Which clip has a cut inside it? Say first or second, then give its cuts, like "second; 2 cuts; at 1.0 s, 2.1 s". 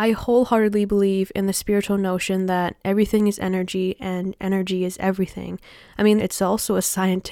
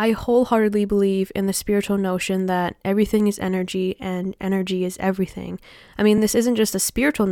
first; 1 cut; at 6.2 s